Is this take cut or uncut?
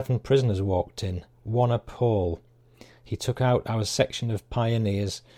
uncut